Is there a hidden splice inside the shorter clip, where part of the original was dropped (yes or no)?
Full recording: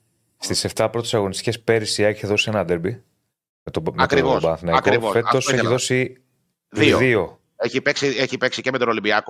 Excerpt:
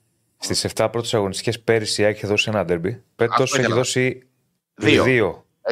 yes